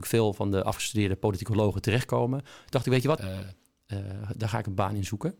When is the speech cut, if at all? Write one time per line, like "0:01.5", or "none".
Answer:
0:03.2